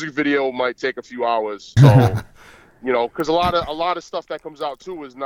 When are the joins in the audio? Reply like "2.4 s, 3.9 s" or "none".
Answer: 1.8 s